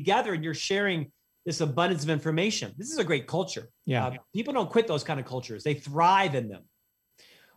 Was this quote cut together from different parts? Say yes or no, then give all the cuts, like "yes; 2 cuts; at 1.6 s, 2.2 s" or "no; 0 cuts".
yes; 1 cut; at 3.8 s